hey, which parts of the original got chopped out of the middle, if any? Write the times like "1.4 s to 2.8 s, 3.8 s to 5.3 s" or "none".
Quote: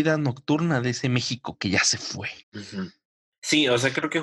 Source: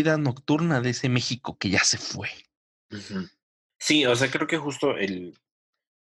2.4 s to 2.8 s